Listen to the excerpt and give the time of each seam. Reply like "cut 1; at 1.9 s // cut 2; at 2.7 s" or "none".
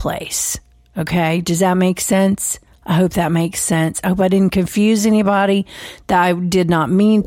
none

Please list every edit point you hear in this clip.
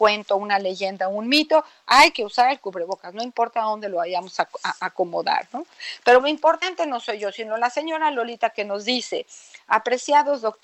cut 1; at 6.2 s

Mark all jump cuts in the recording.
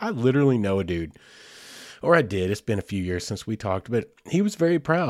none

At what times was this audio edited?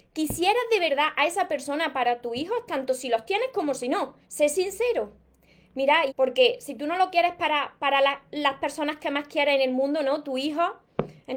cut 1; at 4.2 s // cut 2; at 6.1 s

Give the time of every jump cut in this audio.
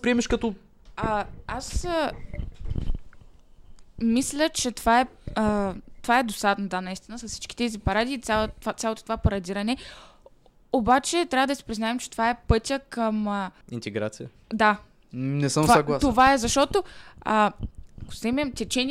cut 1; at 13.6 s

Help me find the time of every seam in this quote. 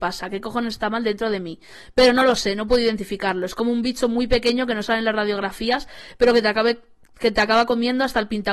none

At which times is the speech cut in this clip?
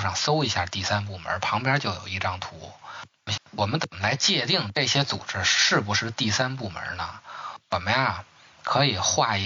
cut 1; at 3.4 s

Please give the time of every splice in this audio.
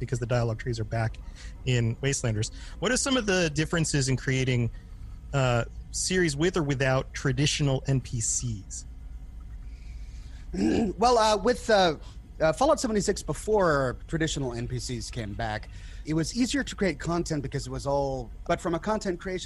cut 1; at 16.0 s // cut 2; at 18.4 s

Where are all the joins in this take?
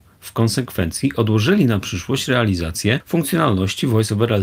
none

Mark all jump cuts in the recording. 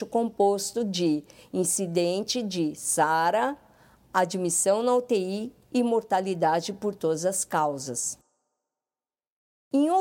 none

